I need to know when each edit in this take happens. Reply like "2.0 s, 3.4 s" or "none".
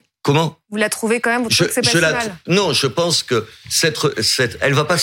none